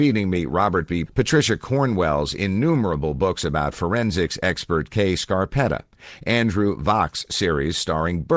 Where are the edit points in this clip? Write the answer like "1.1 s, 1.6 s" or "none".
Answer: 1.1 s